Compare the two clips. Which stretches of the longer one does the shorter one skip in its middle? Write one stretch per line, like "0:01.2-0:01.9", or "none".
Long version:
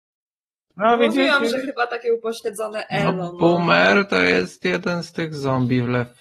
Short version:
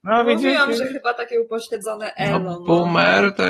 none